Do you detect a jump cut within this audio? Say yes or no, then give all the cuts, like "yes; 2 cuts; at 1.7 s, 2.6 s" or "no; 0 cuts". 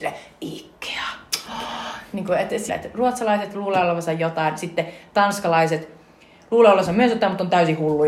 yes; 1 cut; at 2.7 s